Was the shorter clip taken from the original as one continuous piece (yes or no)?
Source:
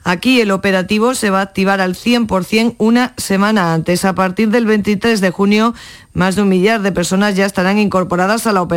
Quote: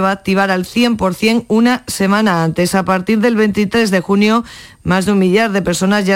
yes